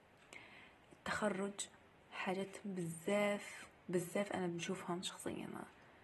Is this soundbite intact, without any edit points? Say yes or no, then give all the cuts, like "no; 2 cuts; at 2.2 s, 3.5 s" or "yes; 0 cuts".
no; 1 cut; at 5.0 s